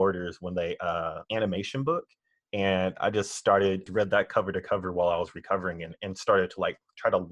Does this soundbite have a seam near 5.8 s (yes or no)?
no